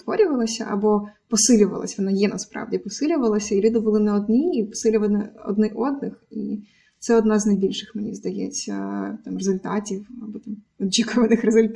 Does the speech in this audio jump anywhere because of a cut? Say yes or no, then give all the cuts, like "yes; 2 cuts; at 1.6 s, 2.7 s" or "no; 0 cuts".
no; 0 cuts